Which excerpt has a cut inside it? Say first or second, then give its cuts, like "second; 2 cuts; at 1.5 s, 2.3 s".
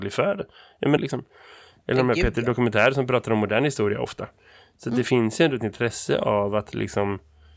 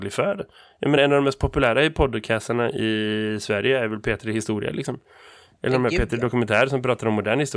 first; 1 cut; at 1.0 s